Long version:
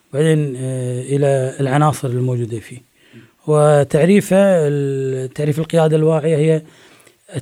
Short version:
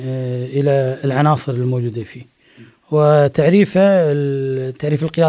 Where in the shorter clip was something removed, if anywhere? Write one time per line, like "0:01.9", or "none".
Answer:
none